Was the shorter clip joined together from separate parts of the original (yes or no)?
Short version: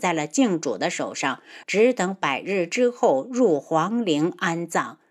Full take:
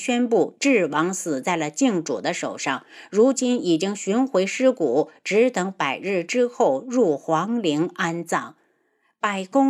yes